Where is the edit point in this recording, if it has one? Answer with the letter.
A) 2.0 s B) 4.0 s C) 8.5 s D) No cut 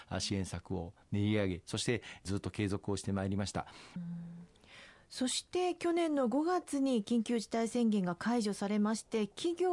B